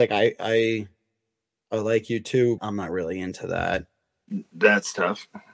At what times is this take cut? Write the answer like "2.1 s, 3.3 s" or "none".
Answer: 2.6 s